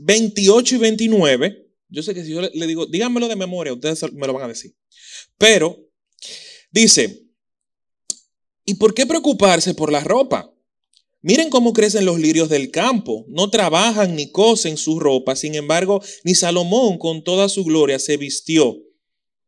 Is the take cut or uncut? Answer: uncut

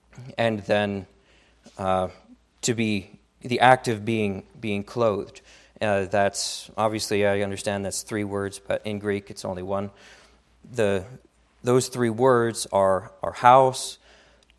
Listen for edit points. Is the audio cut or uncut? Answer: cut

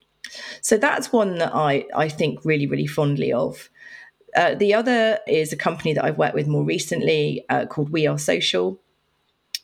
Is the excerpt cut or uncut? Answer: cut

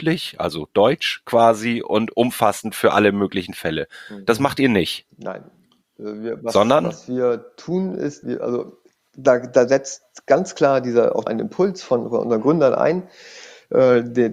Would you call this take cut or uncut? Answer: cut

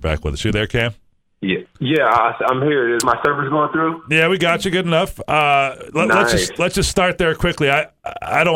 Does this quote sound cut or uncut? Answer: uncut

